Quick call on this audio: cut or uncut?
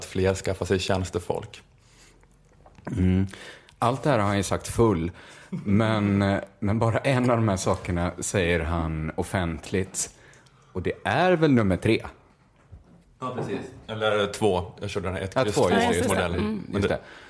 uncut